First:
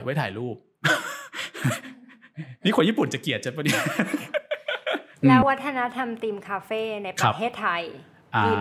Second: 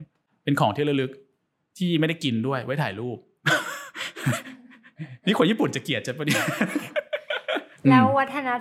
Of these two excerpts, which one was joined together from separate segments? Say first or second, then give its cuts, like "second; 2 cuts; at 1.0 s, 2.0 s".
first; 1 cut; at 5.4 s